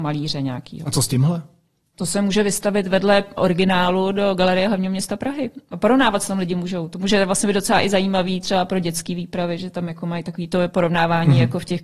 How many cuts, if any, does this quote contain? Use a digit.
1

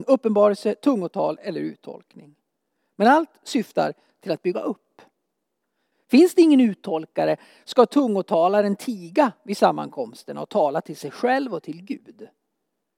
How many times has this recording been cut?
1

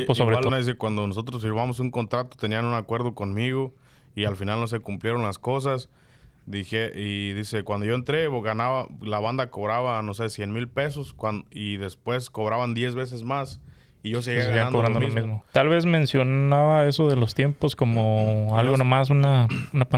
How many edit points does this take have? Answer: 1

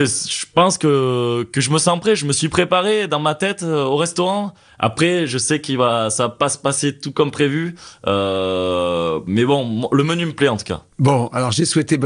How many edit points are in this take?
1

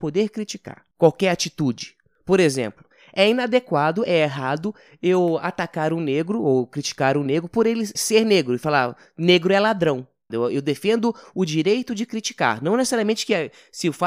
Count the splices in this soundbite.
2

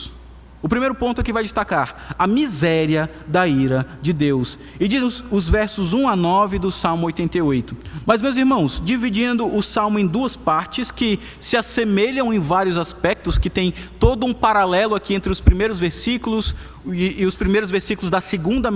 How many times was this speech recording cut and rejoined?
2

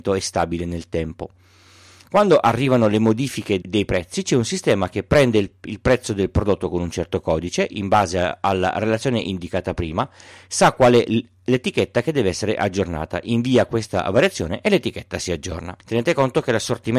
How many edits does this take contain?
2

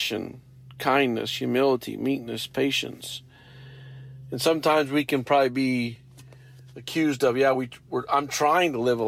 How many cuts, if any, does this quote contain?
0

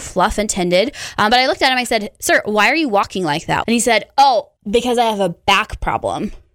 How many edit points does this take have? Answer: 1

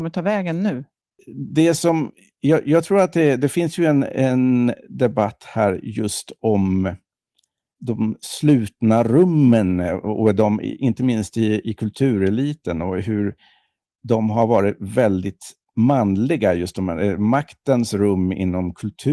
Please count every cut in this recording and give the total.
0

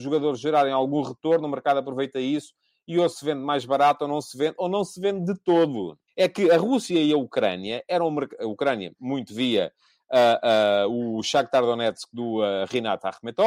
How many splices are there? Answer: 1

